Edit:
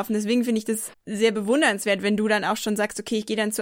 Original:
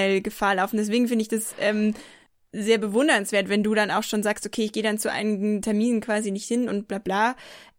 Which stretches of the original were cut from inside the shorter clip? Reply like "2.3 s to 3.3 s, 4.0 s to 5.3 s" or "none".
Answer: 1.6 s to 2.4 s